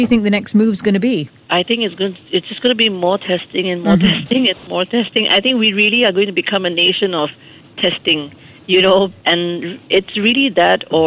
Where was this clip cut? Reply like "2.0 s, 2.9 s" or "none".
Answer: none